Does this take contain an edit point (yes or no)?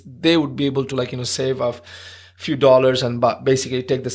no